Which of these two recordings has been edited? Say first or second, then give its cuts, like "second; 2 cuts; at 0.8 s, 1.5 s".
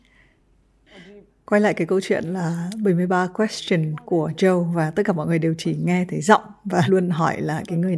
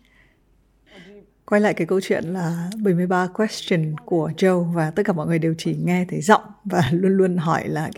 first; 1 cut; at 6.9 s